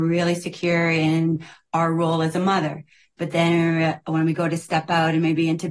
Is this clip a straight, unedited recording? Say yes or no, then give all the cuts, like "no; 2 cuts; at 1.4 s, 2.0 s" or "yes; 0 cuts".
yes; 0 cuts